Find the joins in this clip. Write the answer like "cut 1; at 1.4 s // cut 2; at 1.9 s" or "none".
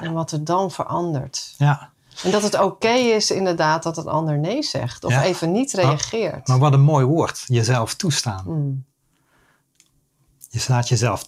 none

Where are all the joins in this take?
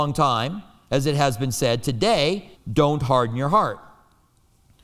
cut 1; at 2.5 s

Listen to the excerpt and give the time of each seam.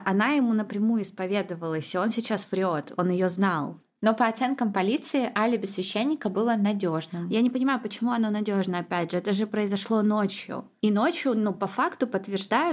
none

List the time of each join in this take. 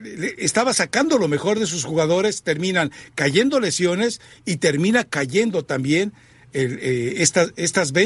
none

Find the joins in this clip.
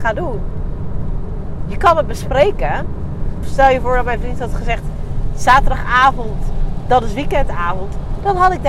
cut 1; at 1.6 s // cut 2; at 3.4 s

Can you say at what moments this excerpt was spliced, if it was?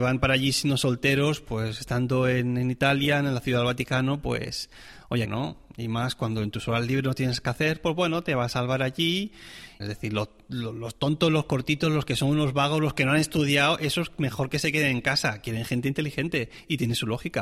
cut 1; at 5.3 s // cut 2; at 9.8 s

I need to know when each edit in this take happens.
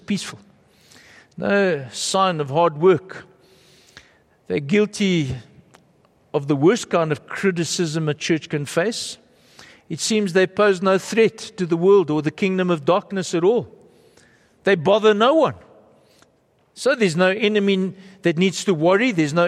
none

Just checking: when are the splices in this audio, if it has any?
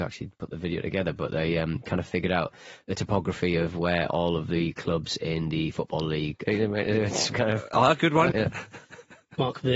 cut 1; at 6.5 s // cut 2; at 8.3 s

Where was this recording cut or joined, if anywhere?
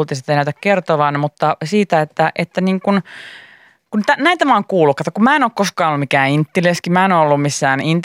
none

